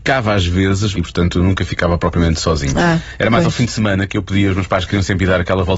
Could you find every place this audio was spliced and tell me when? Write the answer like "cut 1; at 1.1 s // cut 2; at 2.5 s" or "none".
cut 1; at 0.9 s